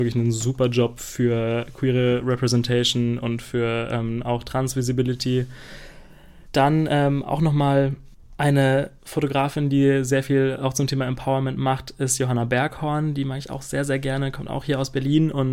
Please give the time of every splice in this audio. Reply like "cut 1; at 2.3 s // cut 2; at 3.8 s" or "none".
none